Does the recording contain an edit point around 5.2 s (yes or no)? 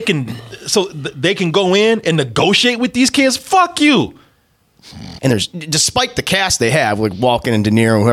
yes